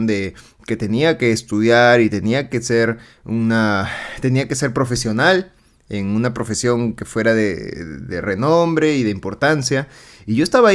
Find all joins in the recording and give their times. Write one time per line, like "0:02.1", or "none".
none